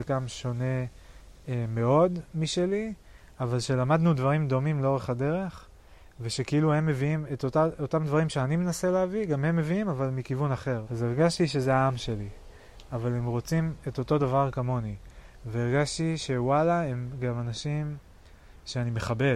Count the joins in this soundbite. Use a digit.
2